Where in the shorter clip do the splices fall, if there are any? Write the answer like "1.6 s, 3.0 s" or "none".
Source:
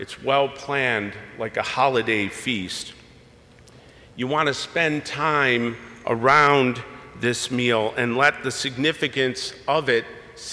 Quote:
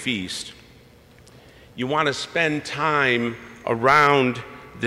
none

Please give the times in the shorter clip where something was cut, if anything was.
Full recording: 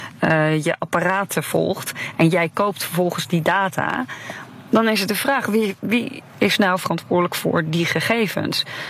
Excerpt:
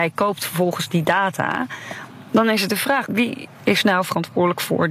3.0 s

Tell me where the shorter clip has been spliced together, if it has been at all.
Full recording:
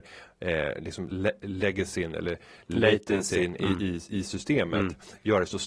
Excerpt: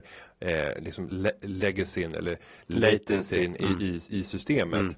none

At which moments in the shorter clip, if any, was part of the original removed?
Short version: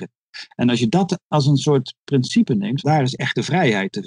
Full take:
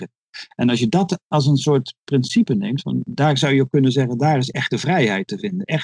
2.8 s

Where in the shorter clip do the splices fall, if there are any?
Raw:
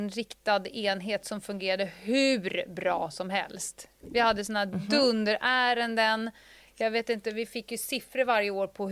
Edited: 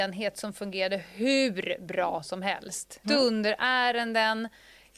3.0 s

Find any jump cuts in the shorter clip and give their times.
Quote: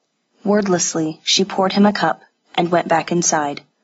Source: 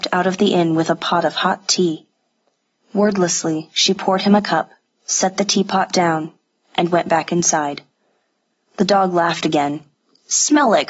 2.5 s

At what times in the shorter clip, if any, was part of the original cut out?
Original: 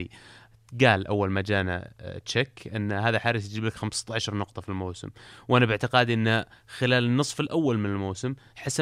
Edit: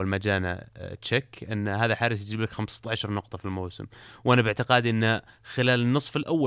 none

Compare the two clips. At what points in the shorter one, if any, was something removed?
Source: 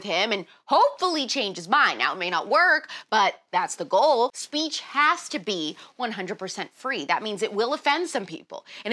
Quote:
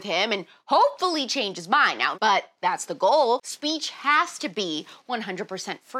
2.1 s

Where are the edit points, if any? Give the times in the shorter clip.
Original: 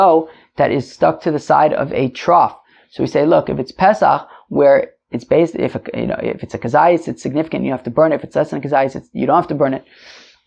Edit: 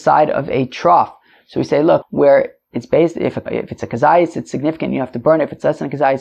2.0 s, 3.5 s

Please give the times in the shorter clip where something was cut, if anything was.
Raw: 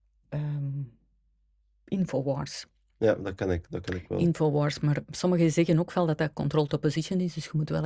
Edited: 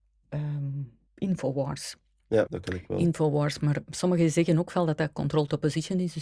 1.1 s, 2.5 s

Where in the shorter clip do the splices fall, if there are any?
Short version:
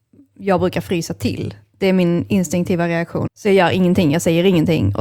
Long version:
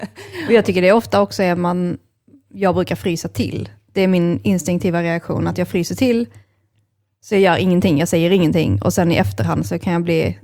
3.3 s

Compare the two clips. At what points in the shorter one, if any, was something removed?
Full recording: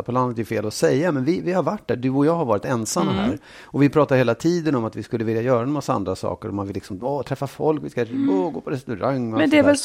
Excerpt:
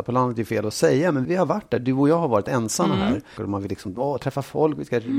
1.2 s, 3.4 s

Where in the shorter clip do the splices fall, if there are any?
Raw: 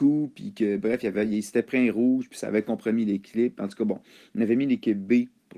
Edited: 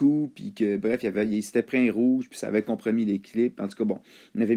none

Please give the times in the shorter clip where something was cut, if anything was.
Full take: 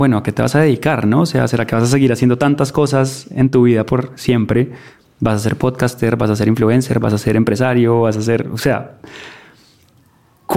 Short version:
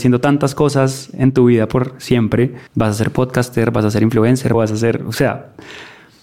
2.7 s, 4.5 s

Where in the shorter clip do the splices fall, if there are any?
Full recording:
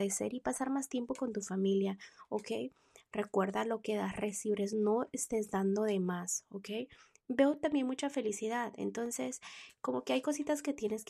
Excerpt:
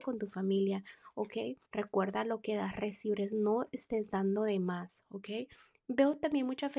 1.7 s

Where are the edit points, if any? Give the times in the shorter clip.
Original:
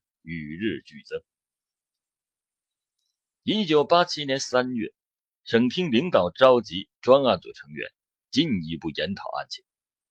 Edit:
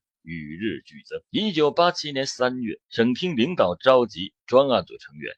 1.2 s, 2.8 s

